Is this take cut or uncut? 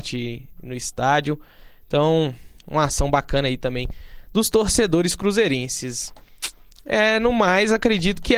uncut